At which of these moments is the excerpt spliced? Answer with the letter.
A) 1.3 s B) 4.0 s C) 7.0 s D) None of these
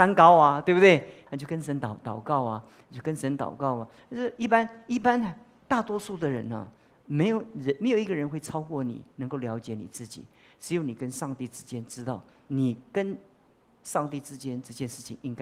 A